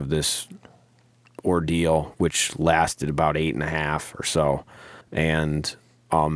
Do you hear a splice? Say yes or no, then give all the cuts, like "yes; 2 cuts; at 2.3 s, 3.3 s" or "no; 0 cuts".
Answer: yes; 1 cut; at 5.0 s